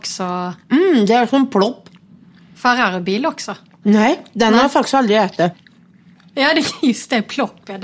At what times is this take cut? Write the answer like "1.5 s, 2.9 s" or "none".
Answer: 3.8 s, 6.2 s